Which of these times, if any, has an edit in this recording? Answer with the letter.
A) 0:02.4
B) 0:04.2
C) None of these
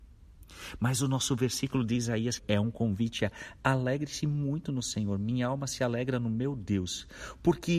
A